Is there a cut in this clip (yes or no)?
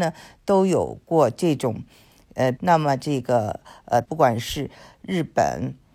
yes